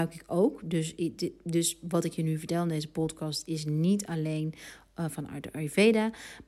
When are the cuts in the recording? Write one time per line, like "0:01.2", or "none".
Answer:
none